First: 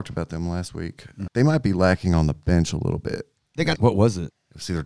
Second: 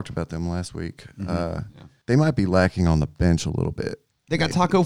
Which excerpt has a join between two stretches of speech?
first; 2 cuts; at 1.3 s, 3.8 s

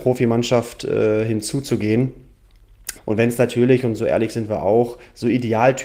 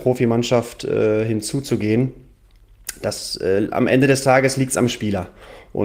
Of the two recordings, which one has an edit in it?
first; 1 cut; at 3.0 s

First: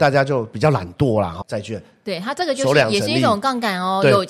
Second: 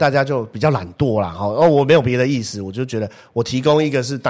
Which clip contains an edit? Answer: first; 1 cut; at 1.4 s

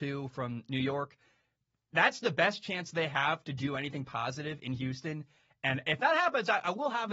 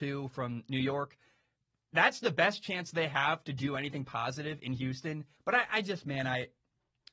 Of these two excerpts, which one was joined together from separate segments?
second; 1 cut; at 5.3 s

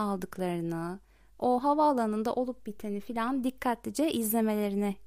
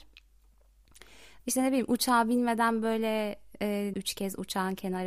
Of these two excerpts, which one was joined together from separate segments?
second; 2 cuts; at 1.4 s, 3.9 s

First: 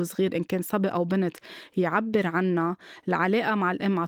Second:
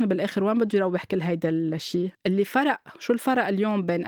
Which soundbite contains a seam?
second; 1 cut; at 2.1 s

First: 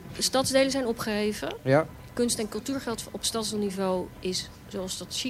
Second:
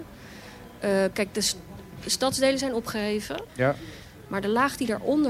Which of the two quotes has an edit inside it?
second; 1 cut; at 3.5 s

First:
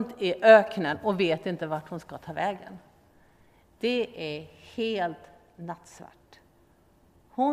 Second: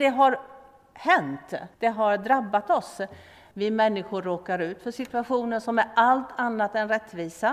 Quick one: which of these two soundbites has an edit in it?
second; 2 cuts; at 1.7 s, 3.5 s

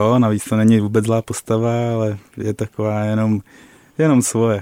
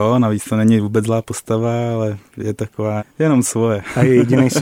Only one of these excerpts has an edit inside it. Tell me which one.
second; 1 cut; at 3.0 s

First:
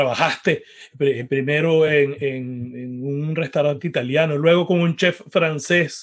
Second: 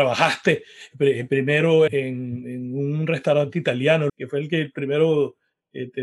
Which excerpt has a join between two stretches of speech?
second; 2 cuts; at 1.9 s, 4.1 s

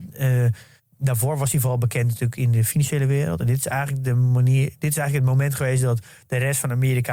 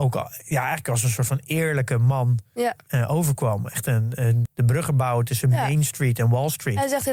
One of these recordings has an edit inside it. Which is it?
second; 1 cut; at 4.4 s

